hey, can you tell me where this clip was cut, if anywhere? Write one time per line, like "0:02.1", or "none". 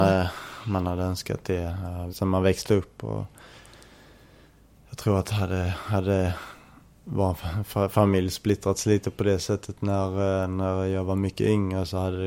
0:02.1